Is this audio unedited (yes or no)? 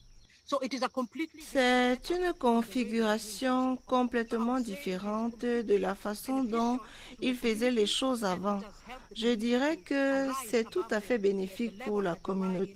yes